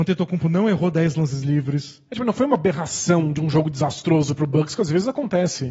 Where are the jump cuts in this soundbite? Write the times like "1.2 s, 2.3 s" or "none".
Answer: 2.1 s